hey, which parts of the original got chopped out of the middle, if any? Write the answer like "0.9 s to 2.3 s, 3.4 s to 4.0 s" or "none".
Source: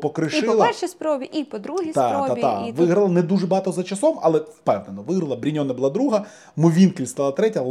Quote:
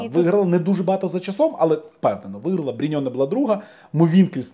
none